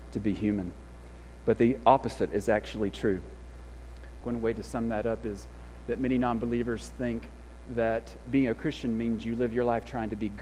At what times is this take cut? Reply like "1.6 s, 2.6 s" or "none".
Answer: 4.2 s, 8.2 s